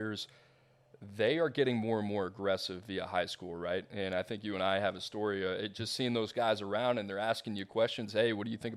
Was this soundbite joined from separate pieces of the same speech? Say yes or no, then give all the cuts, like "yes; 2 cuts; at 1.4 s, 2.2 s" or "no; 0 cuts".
no; 0 cuts